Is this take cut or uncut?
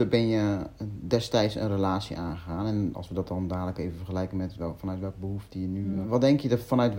cut